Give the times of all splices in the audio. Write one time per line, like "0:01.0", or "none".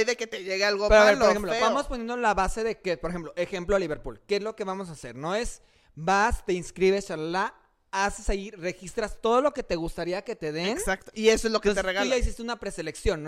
none